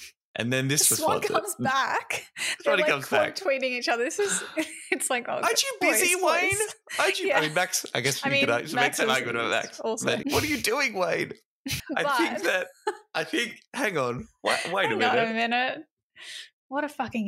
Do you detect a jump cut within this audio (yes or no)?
yes